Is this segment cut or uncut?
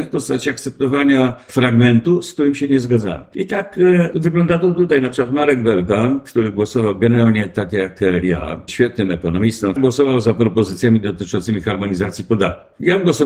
cut